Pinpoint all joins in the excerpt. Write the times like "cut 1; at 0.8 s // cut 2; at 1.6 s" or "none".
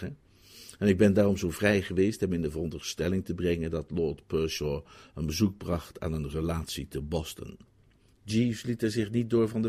cut 1; at 8.1 s